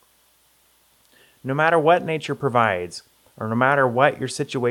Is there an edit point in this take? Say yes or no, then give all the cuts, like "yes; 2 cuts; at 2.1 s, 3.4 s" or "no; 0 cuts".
no; 0 cuts